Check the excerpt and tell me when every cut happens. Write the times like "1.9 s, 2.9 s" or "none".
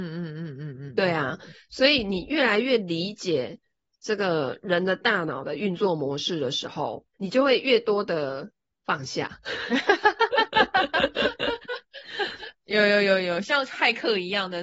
7.1 s, 12.6 s